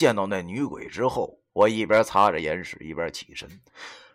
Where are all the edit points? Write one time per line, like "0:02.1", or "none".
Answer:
0:01.5